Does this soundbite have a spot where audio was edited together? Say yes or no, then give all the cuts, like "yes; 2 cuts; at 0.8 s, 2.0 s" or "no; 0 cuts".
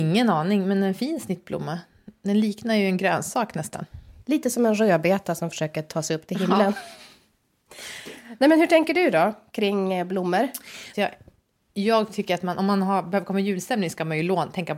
yes; 2 cuts; at 4.2 s, 10.9 s